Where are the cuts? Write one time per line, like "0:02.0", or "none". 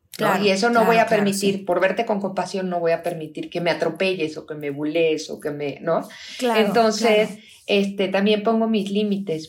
0:03.5